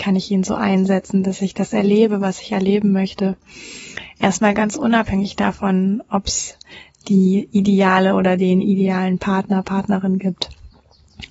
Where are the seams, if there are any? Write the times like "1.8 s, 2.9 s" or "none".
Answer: none